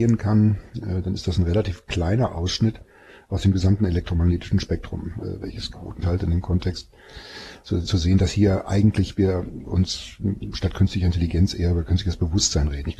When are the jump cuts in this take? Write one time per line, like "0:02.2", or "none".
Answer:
0:06.0
0:07.9